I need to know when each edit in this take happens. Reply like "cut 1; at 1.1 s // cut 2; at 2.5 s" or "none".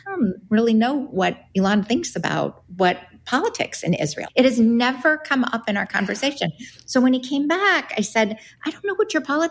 cut 1; at 4.3 s